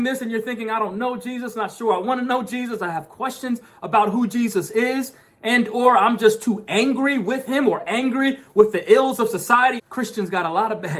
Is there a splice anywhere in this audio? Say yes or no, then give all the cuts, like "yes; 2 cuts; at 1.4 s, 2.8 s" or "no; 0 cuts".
yes; 1 cut; at 9.8 s